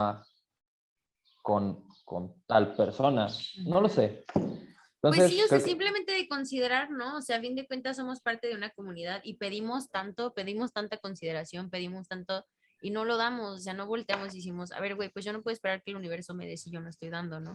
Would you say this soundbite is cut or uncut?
uncut